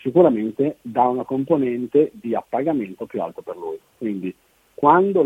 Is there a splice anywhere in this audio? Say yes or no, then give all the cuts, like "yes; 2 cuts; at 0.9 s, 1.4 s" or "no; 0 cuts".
yes; 1 cut; at 3.9 s